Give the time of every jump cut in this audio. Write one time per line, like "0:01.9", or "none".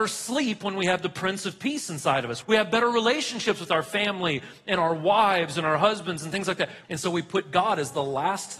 0:02.4
0:06.8